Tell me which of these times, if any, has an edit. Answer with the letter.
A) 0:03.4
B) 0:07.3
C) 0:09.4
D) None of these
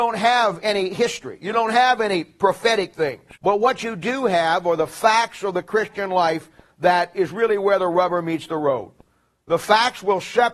A